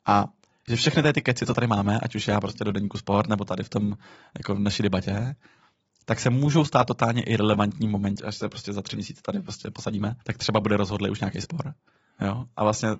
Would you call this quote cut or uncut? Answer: cut